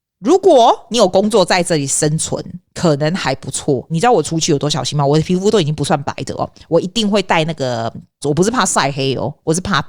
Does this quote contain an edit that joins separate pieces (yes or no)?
yes